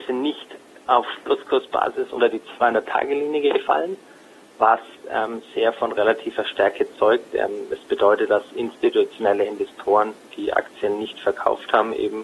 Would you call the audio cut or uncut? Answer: uncut